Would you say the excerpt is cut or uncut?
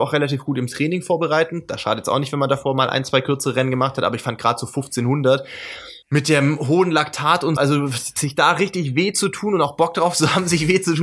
cut